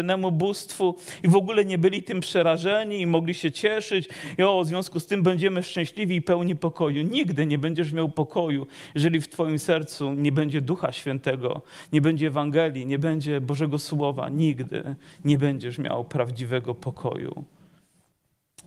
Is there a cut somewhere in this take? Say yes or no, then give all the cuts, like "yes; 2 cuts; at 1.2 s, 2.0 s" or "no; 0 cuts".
no; 0 cuts